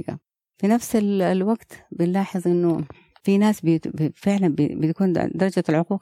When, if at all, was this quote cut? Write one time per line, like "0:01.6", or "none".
none

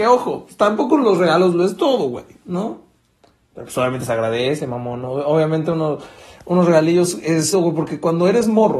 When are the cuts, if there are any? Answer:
0:07.5

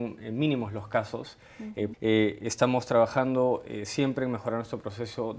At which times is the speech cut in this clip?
0:01.9

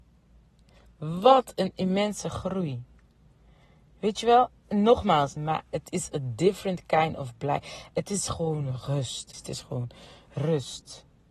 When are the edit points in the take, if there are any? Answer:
0:05.4
0:09.3

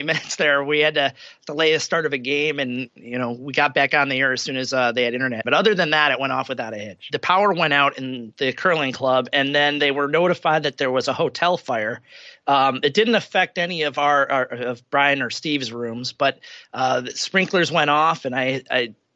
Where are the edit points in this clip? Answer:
0:05.4
0:07.1

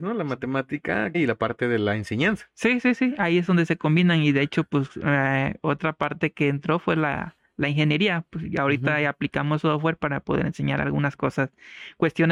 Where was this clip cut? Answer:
0:01.1

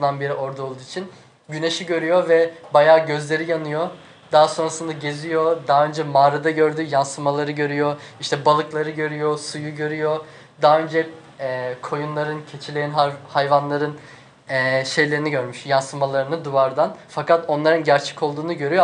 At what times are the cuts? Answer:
none

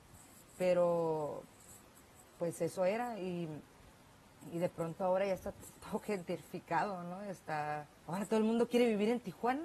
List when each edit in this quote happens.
0:08.0

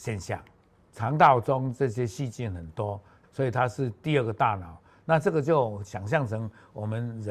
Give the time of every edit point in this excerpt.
0:00.9
0:03.2

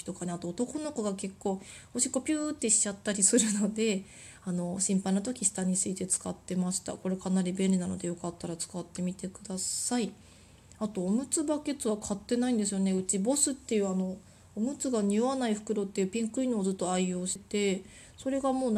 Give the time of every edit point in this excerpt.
0:17.4

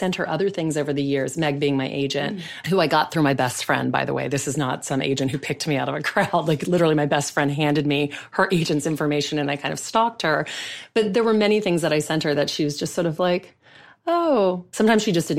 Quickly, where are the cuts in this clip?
none

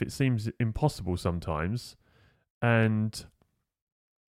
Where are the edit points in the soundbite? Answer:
none

